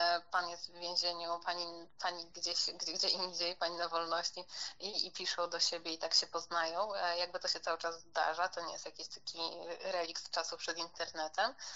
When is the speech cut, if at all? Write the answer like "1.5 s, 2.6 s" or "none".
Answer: none